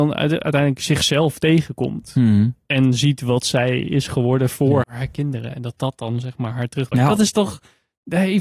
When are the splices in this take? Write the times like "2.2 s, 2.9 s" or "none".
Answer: 4.8 s, 6.9 s